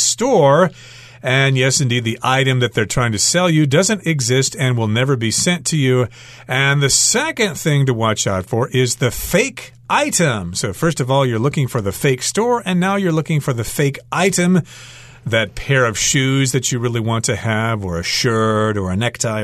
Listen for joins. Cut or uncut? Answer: cut